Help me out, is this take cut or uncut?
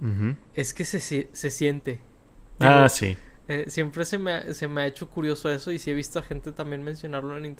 uncut